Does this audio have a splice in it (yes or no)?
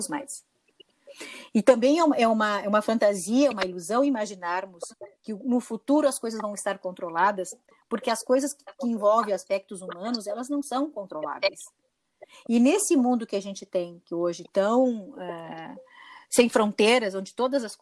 no